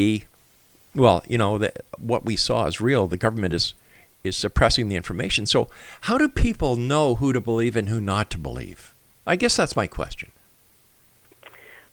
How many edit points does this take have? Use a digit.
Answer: 0